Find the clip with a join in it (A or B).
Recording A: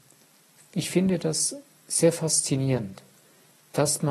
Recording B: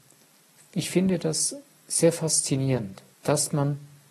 B